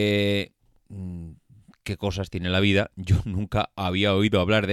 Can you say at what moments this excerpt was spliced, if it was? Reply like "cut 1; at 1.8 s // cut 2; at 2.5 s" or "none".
none